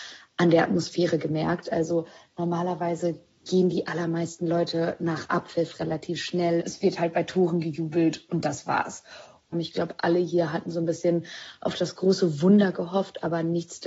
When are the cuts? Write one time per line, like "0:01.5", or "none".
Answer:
0:06.6
0:09.5